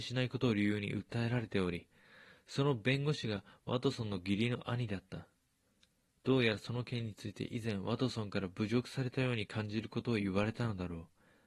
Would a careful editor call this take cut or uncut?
uncut